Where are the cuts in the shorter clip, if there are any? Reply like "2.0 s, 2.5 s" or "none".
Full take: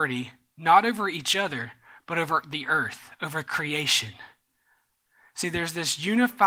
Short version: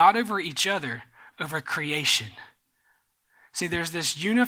1.3 s